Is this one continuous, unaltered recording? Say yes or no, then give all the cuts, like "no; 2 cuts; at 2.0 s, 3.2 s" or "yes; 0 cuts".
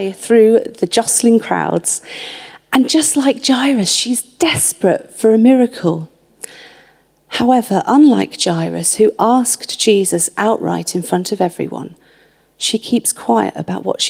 yes; 0 cuts